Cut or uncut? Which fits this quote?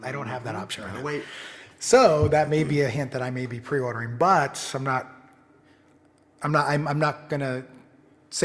uncut